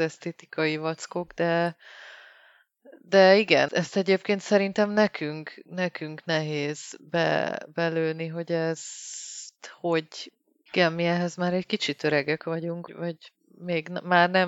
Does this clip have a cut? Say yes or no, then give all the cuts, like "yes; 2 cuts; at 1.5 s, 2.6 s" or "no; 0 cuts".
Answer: yes; 3 cuts; at 3.7 s, 10.7 s, 12.9 s